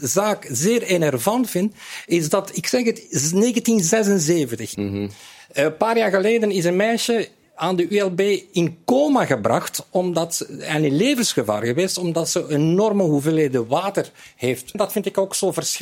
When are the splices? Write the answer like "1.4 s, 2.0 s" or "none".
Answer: 4.7 s, 14.7 s